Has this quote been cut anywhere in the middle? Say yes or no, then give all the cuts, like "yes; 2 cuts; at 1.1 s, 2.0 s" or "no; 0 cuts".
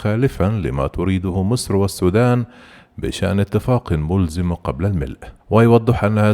yes; 1 cut; at 5.4 s